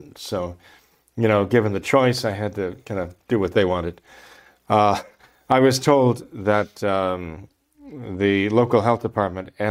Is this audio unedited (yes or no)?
yes